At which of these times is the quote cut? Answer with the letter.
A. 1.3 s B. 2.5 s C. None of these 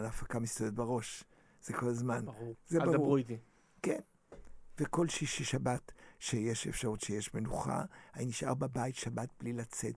B